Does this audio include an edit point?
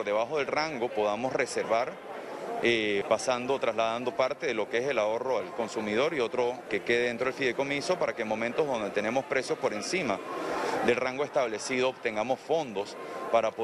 yes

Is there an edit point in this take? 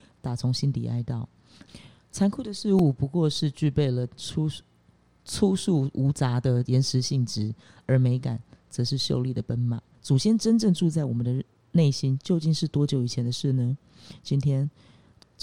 yes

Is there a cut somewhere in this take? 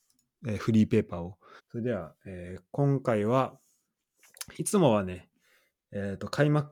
yes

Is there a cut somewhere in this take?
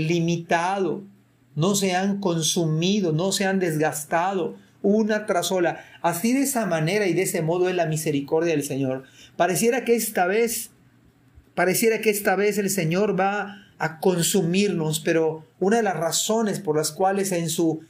no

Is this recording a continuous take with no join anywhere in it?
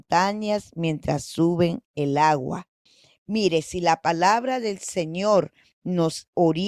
yes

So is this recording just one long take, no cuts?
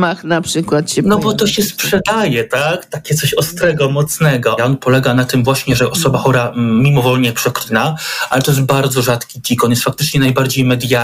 no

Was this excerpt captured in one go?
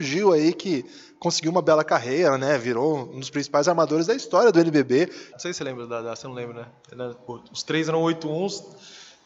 no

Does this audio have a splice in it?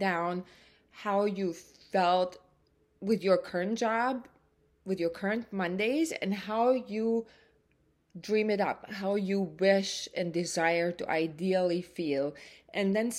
no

